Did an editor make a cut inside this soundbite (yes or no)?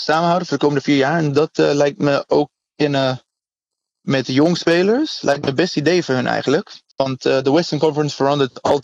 no